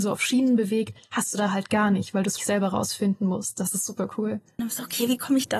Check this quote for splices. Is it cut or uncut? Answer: cut